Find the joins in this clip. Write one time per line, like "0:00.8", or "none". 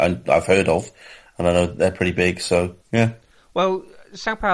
0:02.8

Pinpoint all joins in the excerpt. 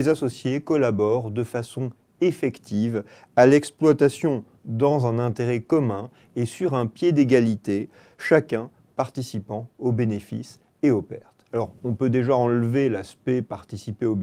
none

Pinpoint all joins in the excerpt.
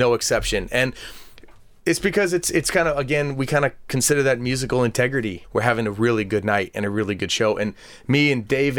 0:05.4

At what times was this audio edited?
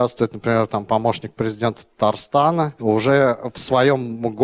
none

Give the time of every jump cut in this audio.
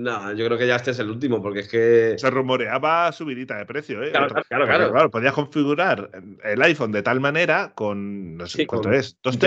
0:04.4

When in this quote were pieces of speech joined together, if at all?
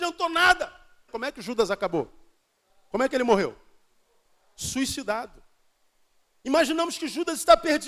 0:01.1

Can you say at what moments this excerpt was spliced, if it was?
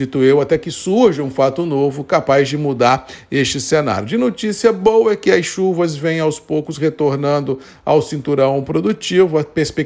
none

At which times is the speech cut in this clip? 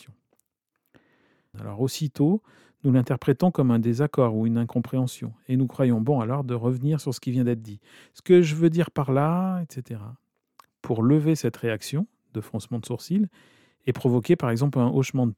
0:01.5

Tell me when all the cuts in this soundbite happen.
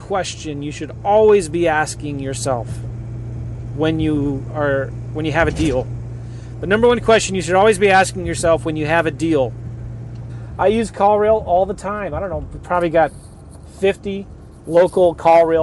0:10.3

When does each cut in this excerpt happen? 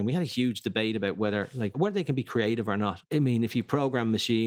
0:01.7

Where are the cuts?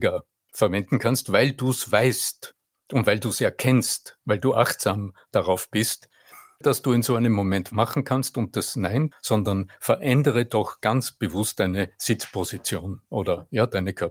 0:06.6
0:09.1

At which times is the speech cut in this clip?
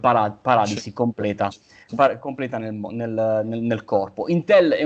none

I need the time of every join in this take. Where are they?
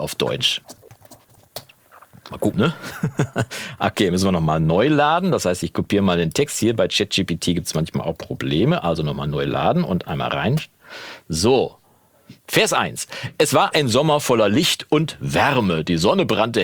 0:02.5

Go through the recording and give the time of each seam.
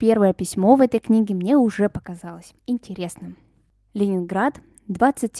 0:02.6

